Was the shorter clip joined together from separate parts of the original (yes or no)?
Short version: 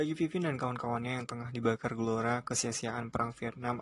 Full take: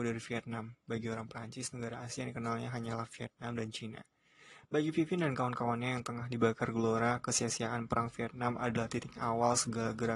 no